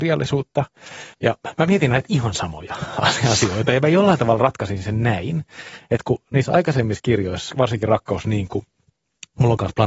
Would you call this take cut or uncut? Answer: cut